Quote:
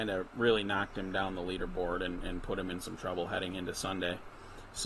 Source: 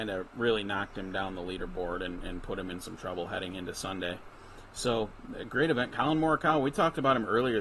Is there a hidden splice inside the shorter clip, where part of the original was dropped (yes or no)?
no